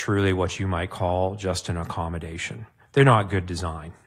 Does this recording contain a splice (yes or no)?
no